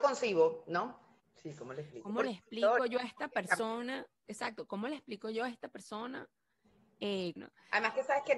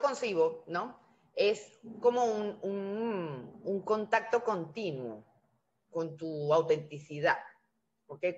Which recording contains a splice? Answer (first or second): first